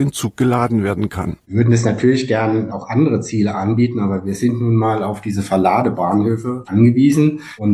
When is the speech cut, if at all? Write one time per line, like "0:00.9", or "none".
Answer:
0:01.4
0:06.7